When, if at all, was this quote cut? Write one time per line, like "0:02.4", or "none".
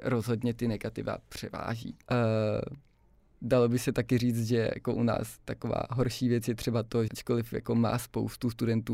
0:02.0
0:07.1